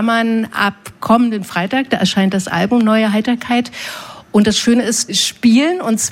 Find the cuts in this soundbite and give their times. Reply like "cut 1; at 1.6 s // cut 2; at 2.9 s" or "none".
cut 1; at 5.1 s